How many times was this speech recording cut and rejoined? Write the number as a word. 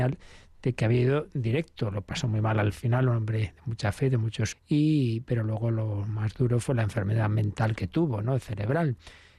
one